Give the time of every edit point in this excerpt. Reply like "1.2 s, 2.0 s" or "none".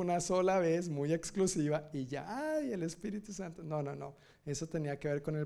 none